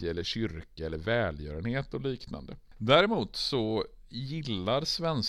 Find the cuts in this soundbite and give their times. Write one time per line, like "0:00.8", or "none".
none